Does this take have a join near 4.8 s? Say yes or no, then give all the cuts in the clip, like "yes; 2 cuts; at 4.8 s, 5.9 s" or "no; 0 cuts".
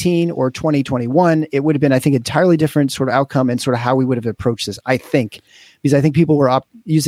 no; 0 cuts